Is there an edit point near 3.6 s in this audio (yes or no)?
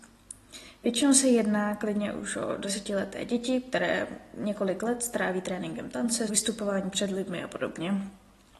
no